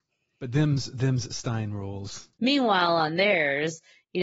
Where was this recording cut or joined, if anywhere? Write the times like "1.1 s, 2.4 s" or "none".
2.4 s